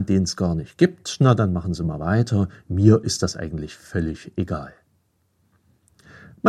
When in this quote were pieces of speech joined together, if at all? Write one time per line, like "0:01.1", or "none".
none

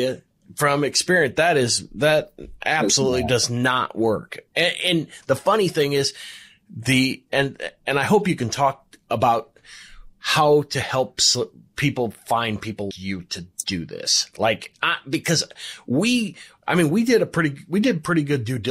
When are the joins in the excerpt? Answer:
0:12.9

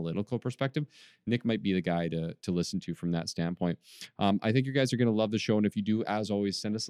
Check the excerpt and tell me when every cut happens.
none

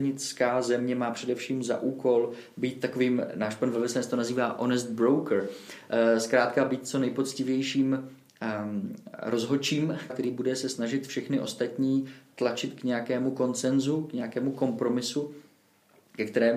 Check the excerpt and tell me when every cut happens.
0:10.1

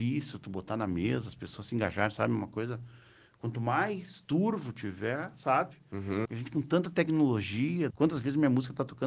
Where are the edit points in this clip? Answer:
0:06.2
0:07.9

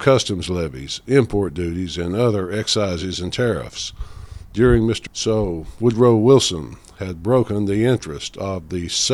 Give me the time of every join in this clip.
0:05.1

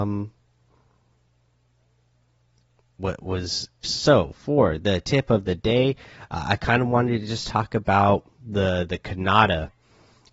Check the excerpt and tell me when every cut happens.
0:03.8
0:08.3

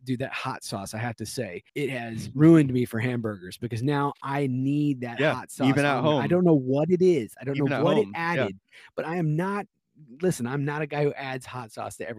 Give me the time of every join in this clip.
0:01.7

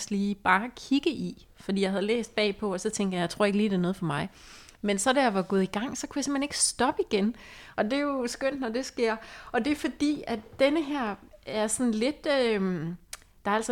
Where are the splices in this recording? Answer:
none

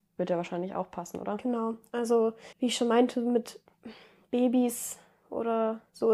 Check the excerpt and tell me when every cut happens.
0:02.5

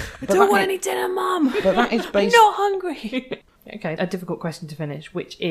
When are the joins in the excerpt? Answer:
0:04.0

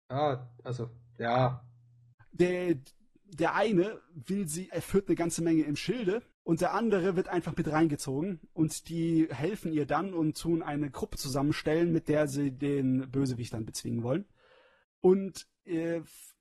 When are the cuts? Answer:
0:02.2
0:04.7
0:06.3

